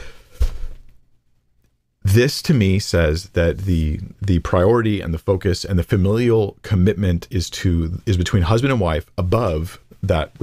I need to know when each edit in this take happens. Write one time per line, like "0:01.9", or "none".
none